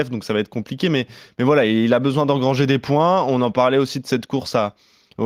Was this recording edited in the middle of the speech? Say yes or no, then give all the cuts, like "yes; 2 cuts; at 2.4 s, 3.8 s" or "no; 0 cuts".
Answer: no; 0 cuts